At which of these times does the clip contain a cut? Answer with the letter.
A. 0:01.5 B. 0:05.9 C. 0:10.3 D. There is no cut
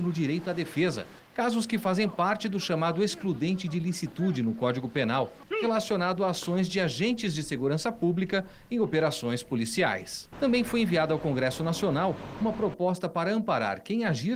C